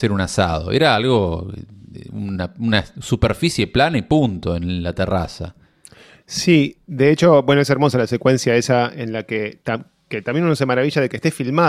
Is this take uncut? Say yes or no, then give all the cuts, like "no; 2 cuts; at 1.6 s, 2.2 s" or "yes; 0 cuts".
yes; 0 cuts